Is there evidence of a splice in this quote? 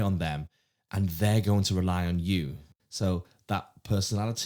yes; 1 cut; at 2.8 s

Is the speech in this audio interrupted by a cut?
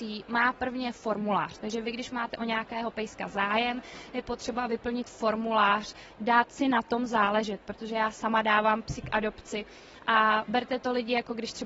no; 0 cuts

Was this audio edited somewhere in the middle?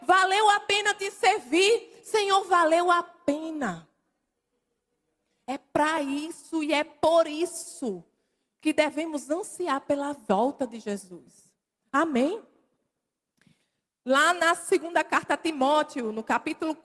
no; 0 cuts

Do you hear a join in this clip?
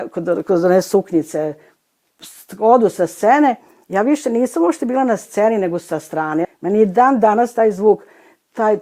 yes; 1 cut; at 6.4 s

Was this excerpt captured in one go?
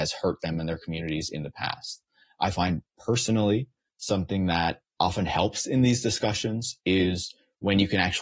no; 2 cuts; at 2.3 s, 4.9 s

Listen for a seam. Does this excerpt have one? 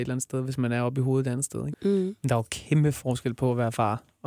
yes; 1 cut; at 1.7 s

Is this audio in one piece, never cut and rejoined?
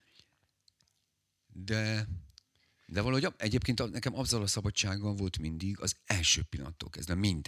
yes; 0 cuts

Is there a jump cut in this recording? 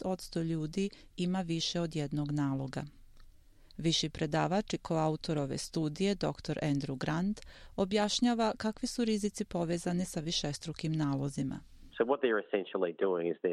no; 0 cuts

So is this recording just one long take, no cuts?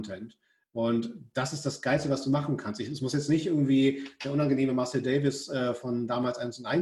yes; 0 cuts

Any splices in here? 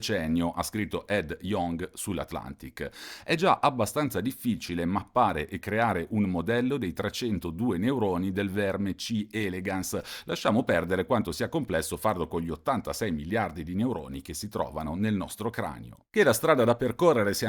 no; 0 cuts

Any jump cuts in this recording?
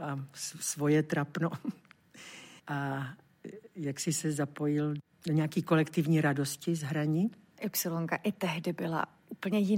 yes; 2 cuts; at 2.6 s, 7.6 s

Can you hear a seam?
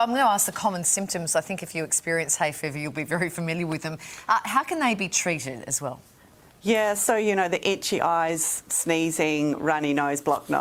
no; 0 cuts

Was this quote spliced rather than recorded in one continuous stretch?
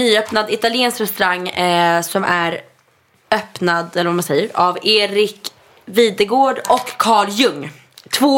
no; 0 cuts

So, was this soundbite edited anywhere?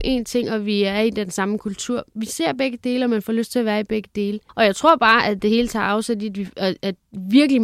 yes; 1 cut; at 4.5 s

